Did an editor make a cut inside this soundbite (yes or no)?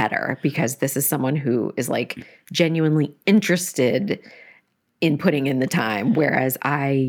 no